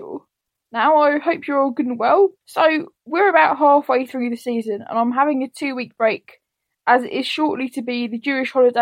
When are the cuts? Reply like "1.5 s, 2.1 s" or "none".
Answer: 2.4 s